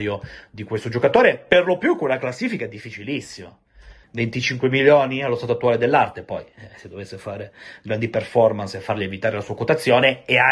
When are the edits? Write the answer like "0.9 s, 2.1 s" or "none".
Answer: 4.0 s